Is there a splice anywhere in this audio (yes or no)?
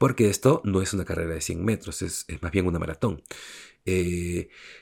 yes